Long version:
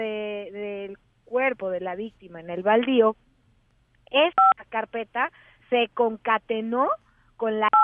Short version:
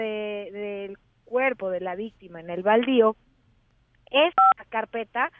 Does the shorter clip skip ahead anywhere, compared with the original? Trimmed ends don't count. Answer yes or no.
no